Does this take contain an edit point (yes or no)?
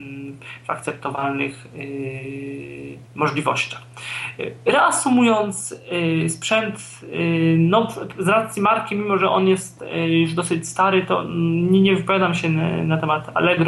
yes